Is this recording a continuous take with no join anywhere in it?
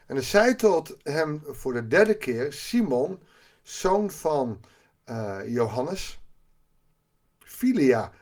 yes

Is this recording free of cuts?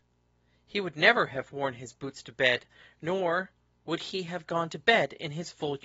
yes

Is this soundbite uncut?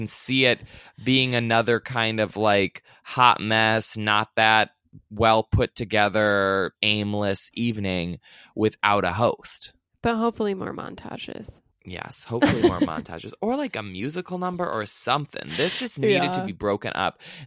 no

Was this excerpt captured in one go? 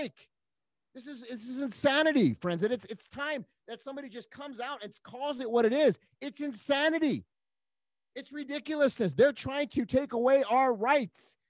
yes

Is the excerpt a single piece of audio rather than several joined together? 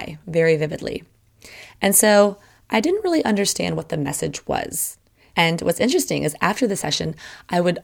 no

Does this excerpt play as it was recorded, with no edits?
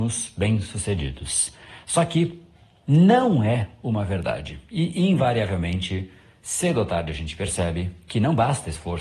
yes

